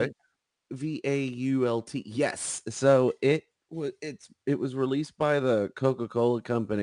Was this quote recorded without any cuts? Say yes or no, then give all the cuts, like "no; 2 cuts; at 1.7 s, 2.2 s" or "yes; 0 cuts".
yes; 0 cuts